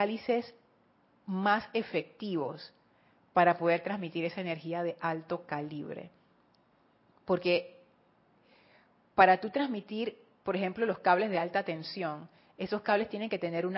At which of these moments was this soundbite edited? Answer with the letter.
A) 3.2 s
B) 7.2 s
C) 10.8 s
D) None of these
D